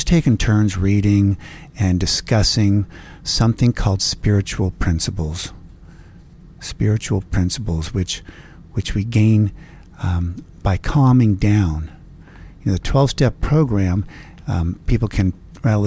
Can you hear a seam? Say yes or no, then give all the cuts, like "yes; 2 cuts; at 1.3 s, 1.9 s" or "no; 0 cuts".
no; 0 cuts